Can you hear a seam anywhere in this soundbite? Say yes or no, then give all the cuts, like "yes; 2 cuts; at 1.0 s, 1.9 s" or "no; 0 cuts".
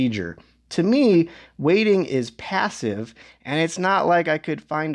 no; 0 cuts